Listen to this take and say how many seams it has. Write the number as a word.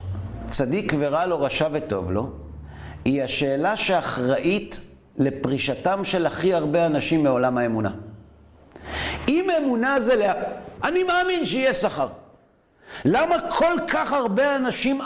one